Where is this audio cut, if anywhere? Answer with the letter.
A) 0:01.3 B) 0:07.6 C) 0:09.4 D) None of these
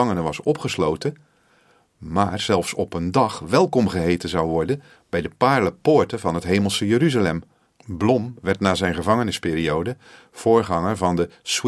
B